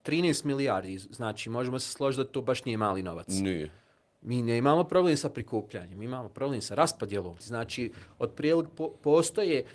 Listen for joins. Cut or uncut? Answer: cut